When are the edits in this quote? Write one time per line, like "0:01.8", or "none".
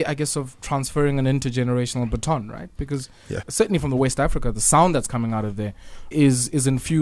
0:03.4
0:06.1